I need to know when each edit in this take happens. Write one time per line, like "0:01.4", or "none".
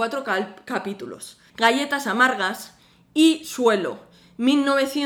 0:01.5